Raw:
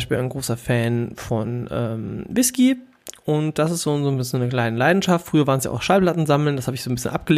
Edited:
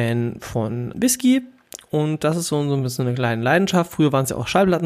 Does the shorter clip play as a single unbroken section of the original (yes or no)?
no